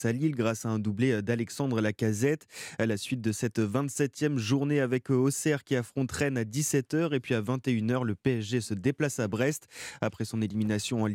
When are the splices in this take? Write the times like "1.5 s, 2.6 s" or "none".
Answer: none